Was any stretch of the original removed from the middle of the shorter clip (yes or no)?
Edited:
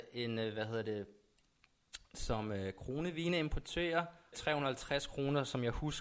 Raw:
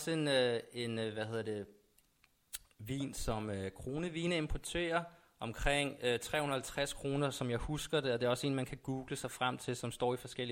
yes